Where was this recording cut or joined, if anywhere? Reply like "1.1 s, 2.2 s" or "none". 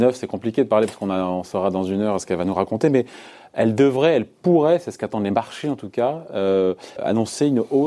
7.0 s